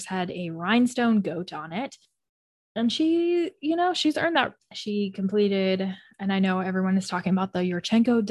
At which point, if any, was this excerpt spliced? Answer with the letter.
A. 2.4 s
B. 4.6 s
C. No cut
B